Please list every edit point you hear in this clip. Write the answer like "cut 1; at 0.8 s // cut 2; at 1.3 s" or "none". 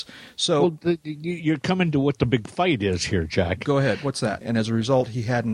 cut 1; at 4.4 s